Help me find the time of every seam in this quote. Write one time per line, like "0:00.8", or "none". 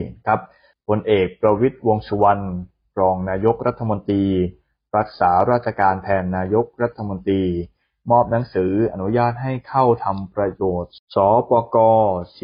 none